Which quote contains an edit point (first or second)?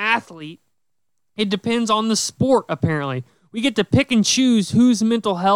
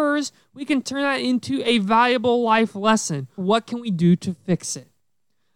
second